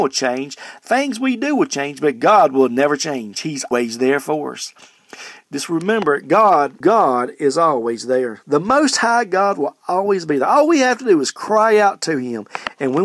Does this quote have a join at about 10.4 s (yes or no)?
no